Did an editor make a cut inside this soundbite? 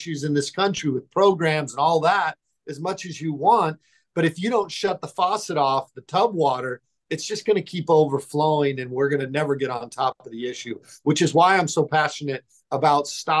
no; 0 cuts

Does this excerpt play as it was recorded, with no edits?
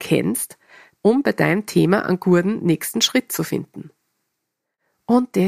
no; 1 cut; at 0.9 s

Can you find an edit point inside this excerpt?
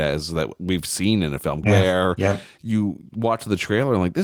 yes; 1 cut; at 1.6 s

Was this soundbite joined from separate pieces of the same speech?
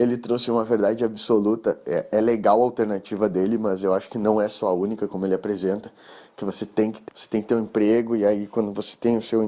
yes; 1 cut; at 7.1 s

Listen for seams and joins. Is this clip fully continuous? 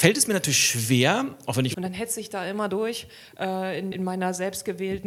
no; 2 cuts; at 1.7 s, 3.9 s

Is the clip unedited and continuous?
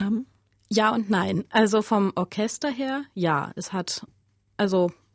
yes; 0 cuts

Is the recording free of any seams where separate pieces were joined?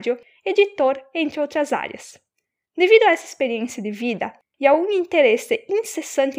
yes; 0 cuts

